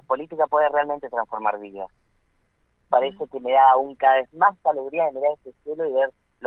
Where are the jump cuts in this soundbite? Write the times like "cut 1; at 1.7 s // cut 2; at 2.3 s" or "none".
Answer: cut 1; at 2.9 s